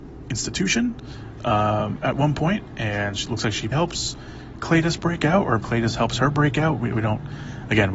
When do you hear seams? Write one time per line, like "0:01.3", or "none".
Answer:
0:03.7
0:05.6